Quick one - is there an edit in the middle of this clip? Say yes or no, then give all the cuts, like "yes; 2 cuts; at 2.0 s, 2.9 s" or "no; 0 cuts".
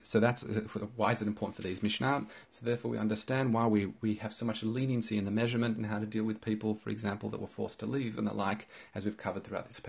yes; 1 cut; at 2.4 s